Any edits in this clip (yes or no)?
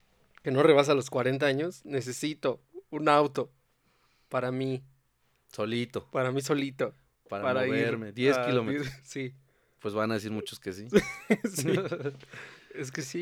no